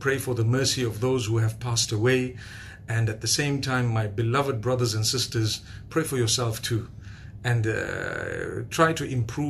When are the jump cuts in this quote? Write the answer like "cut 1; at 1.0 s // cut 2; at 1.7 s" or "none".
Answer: none